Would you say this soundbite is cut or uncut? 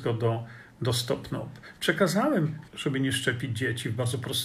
cut